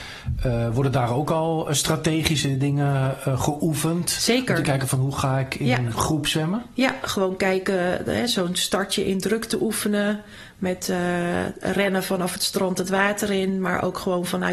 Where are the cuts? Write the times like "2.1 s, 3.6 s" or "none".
none